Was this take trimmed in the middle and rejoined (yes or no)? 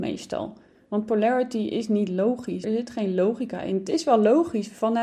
yes